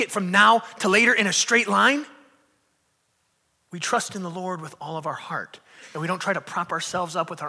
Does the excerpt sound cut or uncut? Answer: uncut